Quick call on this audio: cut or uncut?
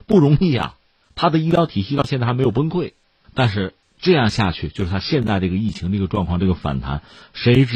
uncut